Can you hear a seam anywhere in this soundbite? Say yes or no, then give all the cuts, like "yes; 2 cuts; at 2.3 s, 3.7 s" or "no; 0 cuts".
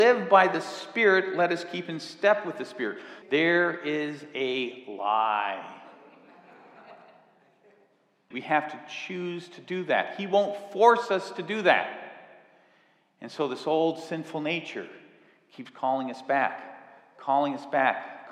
yes; 2 cuts; at 3.2 s, 8.3 s